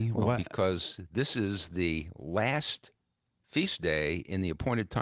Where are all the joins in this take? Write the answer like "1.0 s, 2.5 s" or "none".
none

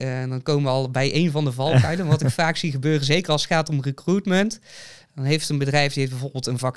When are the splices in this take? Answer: none

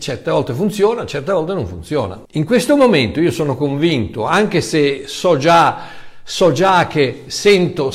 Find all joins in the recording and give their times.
2.3 s

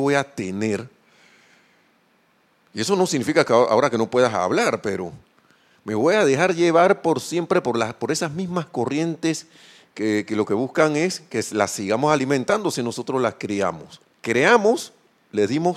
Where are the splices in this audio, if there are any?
14.0 s

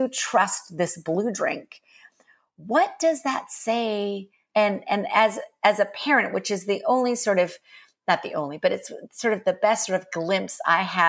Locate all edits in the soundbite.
4.5 s

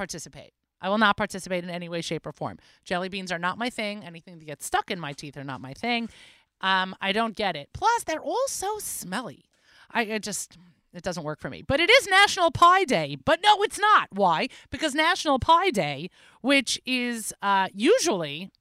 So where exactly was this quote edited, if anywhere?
none

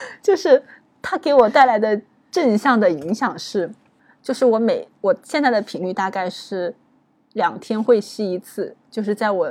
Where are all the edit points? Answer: none

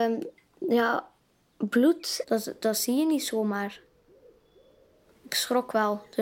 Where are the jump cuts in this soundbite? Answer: 2.2 s

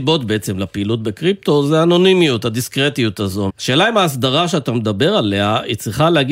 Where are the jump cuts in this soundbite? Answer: 3.5 s

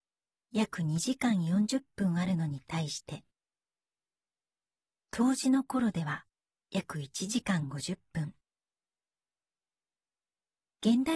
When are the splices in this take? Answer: none

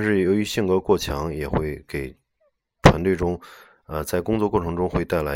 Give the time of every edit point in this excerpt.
none

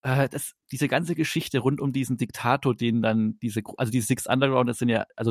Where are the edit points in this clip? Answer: none

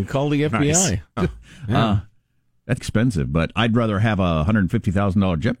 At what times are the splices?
1.2 s, 2.8 s

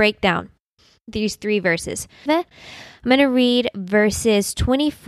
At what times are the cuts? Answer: 2.3 s

